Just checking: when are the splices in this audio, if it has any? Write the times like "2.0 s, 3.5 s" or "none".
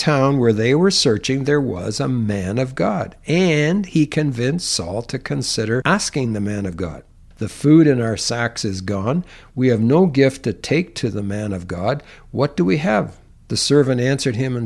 7.3 s